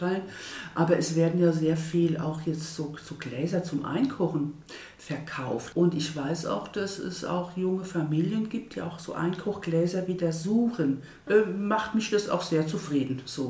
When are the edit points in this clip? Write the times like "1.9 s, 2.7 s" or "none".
5.7 s, 11.3 s